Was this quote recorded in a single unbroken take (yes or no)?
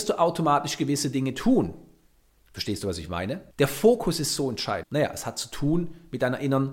no